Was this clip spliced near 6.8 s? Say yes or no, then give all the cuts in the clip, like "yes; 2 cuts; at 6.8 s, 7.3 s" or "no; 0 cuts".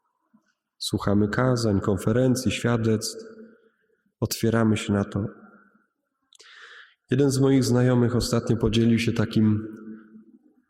no; 1 cut; at 4.1 s